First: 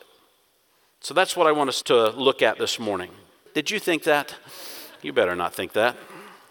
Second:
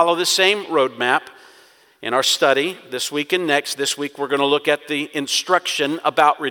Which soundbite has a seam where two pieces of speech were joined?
first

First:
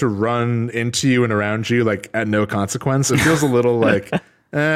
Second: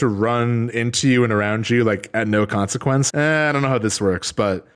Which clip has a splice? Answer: second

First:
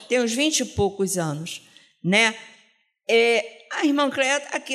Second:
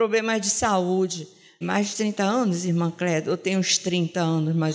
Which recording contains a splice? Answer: second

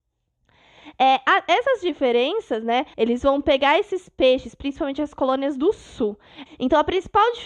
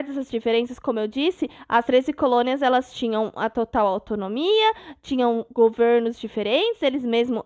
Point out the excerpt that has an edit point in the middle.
first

